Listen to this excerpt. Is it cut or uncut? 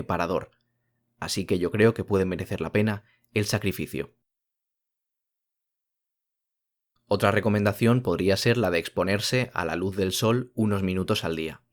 uncut